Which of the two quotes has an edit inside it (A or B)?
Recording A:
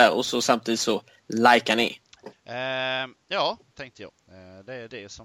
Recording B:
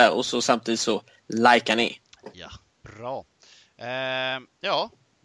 A